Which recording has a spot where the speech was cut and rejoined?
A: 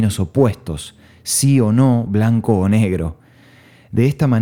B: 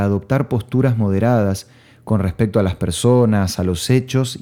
A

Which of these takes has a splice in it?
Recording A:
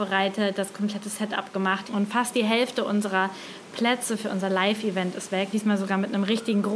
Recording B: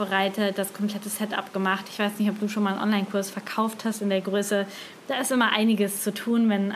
A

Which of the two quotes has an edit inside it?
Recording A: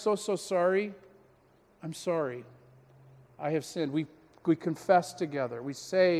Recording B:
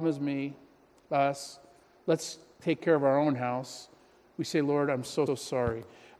B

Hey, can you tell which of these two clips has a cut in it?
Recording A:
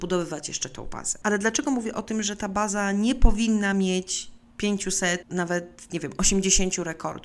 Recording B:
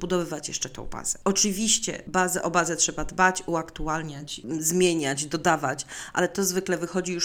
A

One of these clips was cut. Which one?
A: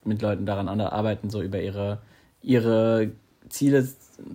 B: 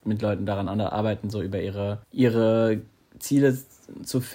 B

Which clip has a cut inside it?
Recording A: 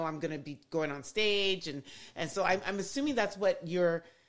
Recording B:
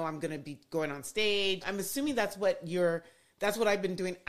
B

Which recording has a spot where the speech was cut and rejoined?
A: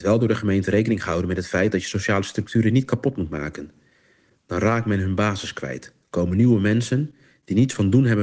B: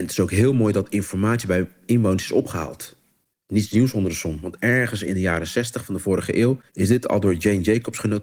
B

